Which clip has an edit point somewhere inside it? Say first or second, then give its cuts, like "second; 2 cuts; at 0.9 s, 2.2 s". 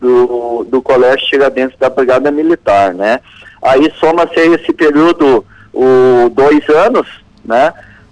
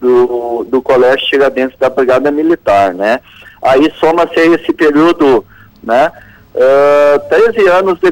second; 1 cut; at 5.7 s